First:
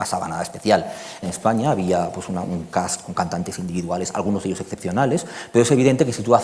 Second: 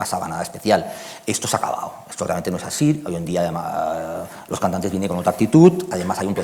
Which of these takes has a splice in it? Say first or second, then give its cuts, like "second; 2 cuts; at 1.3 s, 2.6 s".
first; 1 cut; at 1.2 s